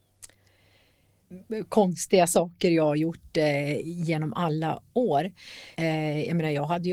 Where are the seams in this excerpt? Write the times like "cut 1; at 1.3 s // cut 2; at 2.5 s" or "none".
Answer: cut 1; at 5.7 s